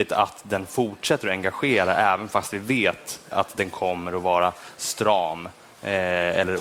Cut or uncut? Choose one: cut